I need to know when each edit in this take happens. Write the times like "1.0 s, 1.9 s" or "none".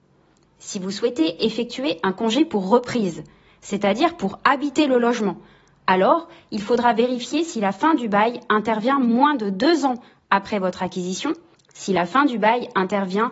11.5 s